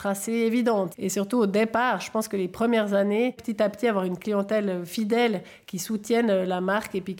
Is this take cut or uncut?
cut